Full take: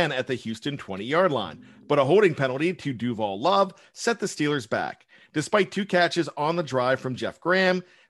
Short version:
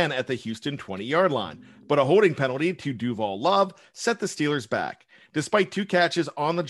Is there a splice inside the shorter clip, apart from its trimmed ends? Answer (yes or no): no